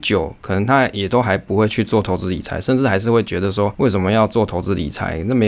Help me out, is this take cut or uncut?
uncut